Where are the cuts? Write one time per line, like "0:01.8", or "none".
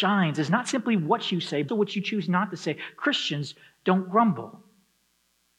0:01.7

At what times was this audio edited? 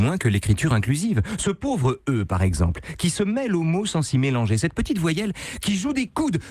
none

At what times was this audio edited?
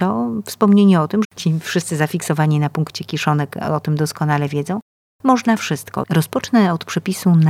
0:01.2
0:06.0

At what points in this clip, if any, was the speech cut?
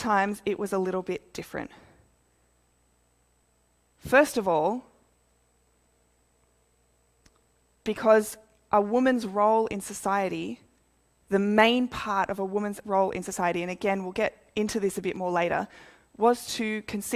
none

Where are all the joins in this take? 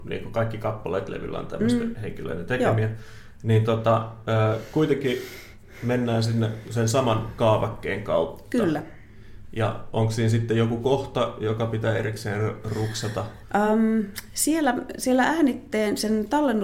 none

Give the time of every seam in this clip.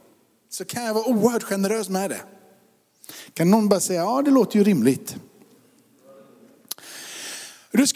none

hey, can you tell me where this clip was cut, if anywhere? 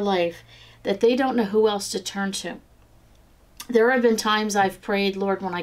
none

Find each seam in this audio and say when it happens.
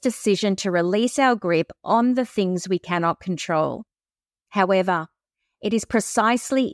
0:04.3

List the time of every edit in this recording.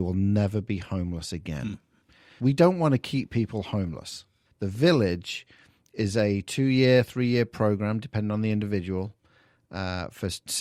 0:02.4
0:04.5

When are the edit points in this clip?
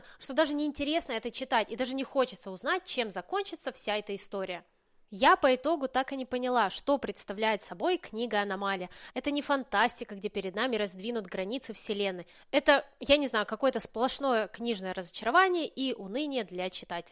0:09.1

